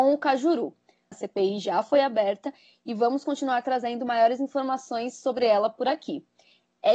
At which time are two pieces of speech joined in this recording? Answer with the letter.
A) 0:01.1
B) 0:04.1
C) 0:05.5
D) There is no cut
A